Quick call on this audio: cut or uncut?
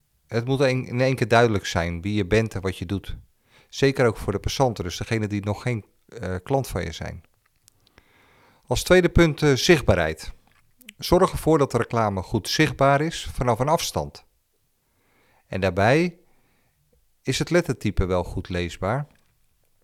uncut